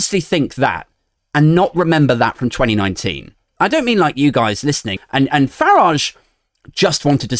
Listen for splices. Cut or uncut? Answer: cut